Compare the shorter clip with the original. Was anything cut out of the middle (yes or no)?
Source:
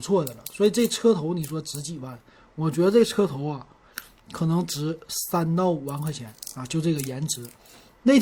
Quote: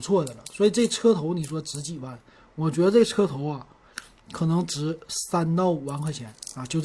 no